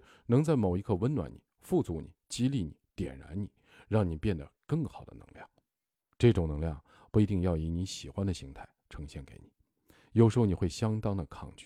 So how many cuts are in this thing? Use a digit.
0